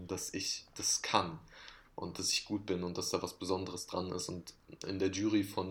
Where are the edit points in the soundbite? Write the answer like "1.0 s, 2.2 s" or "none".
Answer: none